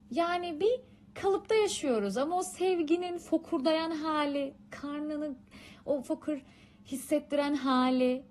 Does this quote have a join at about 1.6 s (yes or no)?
no